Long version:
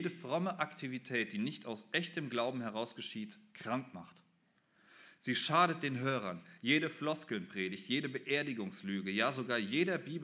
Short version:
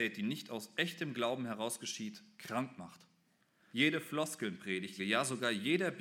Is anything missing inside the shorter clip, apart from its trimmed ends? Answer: yes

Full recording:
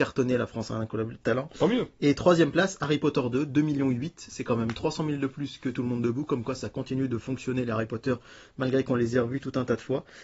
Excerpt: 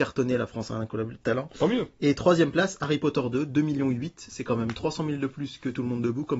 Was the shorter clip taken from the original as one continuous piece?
yes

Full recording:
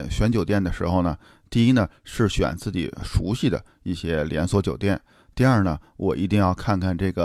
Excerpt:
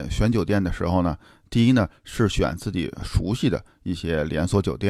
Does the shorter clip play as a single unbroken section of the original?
yes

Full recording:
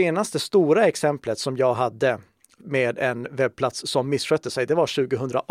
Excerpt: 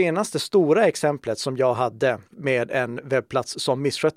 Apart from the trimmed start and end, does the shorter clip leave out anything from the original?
yes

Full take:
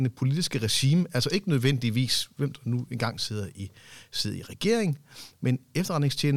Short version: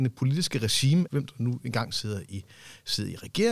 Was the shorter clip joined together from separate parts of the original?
yes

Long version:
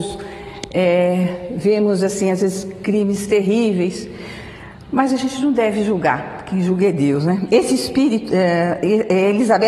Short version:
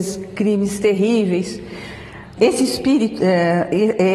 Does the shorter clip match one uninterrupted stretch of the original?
no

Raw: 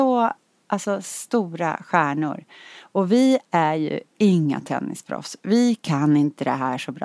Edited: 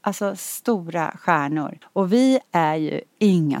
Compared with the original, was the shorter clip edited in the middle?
yes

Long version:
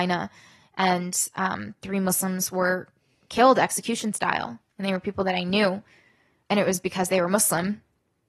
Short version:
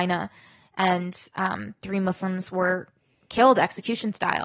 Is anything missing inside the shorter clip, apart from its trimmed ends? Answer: no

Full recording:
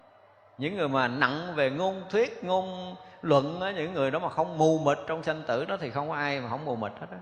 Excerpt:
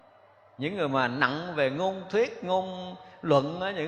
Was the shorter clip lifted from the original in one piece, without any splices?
yes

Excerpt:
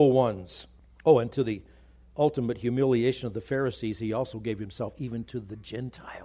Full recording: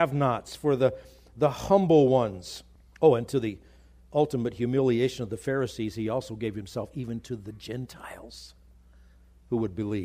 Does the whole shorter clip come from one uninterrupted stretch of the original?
yes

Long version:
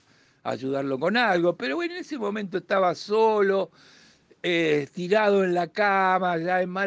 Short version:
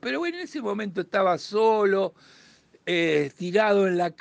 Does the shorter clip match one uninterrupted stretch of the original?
yes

